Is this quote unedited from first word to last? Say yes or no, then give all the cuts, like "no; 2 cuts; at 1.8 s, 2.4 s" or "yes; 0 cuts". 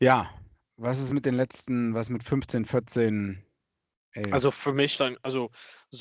yes; 0 cuts